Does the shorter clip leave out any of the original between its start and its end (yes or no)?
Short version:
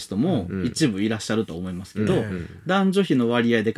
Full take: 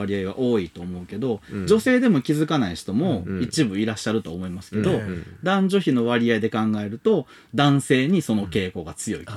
no